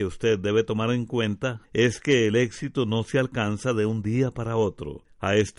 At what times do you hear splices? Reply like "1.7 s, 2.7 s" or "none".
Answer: 1.6 s